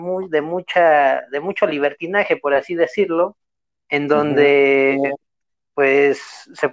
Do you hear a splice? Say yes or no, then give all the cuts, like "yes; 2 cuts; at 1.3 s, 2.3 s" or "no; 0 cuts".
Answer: no; 0 cuts